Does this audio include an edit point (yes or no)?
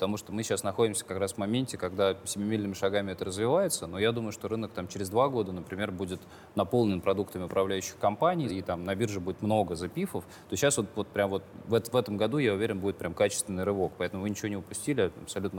no